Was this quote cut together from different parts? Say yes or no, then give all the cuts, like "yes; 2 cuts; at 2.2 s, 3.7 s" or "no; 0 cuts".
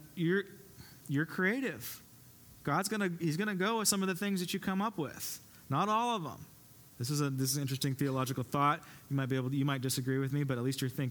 no; 0 cuts